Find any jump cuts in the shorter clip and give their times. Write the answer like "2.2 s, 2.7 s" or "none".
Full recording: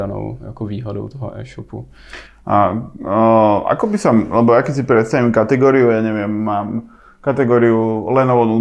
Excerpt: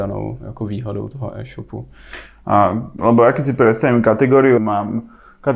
3.0 s, 4.6 s

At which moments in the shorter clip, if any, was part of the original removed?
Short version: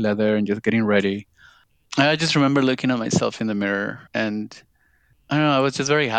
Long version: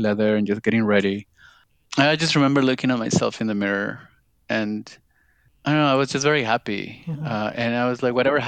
4.1 s

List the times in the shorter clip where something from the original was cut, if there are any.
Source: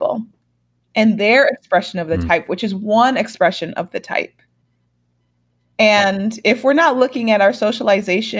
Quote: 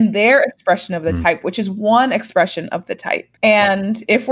3.4 s

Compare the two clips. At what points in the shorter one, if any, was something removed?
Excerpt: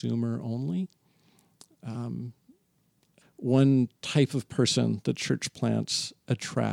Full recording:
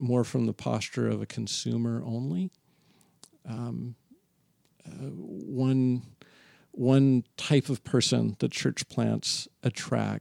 3.2 s

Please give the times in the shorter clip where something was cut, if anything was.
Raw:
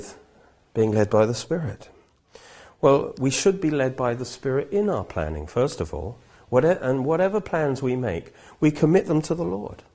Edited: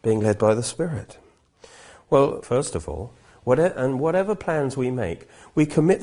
2.4 s

